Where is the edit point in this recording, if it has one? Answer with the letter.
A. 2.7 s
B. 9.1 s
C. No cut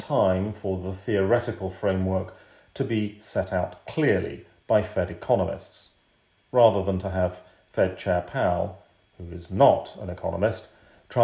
C